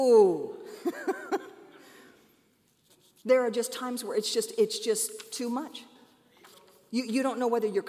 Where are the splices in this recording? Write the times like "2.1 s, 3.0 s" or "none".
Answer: none